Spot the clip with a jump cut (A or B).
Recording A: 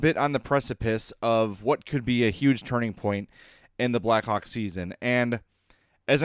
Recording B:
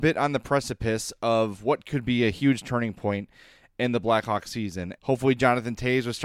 B